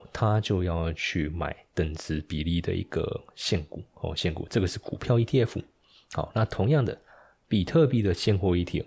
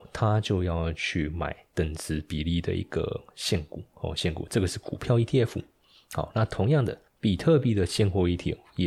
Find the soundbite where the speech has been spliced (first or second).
second